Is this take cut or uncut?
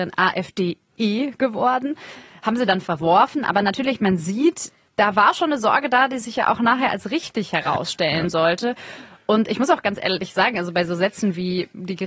uncut